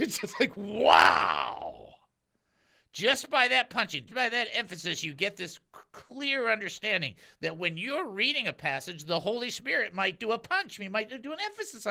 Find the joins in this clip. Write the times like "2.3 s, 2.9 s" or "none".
4.1 s